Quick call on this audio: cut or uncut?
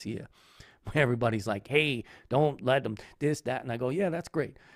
uncut